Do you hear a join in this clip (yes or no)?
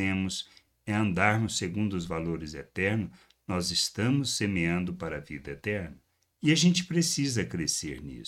no